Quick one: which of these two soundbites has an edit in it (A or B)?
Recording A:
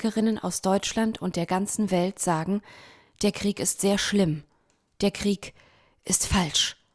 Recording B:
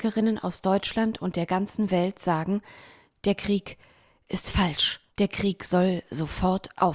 B